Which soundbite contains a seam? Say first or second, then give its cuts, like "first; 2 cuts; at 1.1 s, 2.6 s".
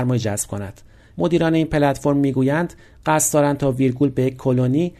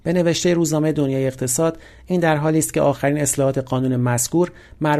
first; 1 cut; at 1.1 s